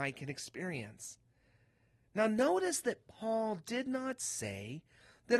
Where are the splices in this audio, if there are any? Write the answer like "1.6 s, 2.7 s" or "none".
none